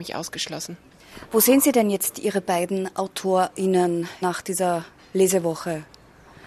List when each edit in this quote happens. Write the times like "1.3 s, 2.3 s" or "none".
none